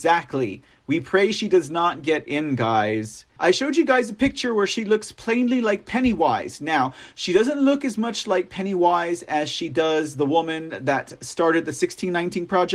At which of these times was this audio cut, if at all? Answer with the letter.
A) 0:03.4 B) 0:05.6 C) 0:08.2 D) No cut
A